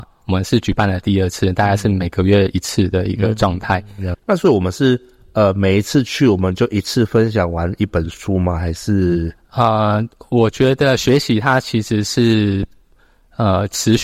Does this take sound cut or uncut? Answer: cut